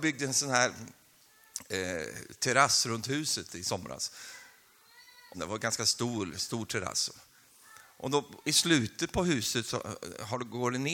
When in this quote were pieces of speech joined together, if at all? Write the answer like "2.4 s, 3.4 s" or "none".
5.3 s